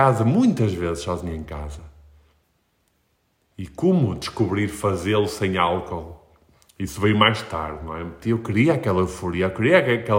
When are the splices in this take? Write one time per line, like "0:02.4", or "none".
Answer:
0:08.2